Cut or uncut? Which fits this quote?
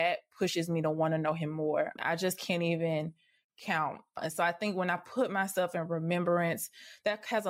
cut